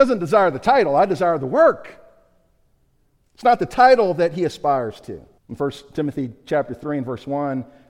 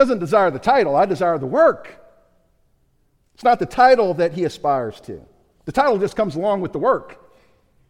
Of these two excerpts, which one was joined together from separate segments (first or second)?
first